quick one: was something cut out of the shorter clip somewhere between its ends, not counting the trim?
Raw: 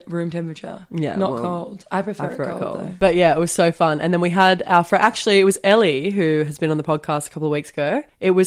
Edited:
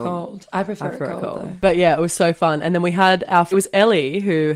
yes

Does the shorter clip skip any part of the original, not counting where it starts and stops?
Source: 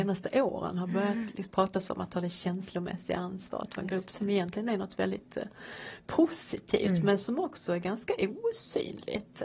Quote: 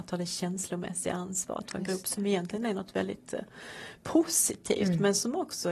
no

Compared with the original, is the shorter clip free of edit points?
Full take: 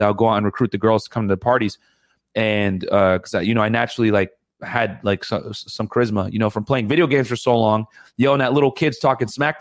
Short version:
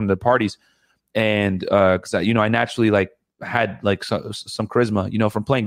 yes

